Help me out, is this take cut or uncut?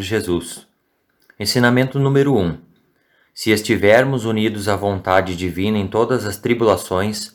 uncut